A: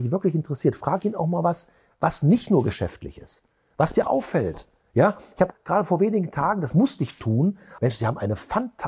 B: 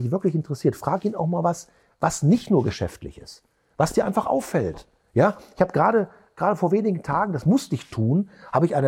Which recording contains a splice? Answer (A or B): A